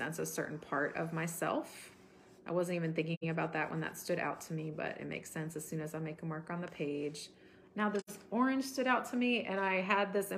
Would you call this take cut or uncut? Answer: cut